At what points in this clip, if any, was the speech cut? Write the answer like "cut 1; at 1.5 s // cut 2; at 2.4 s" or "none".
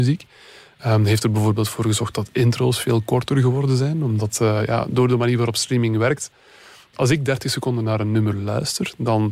none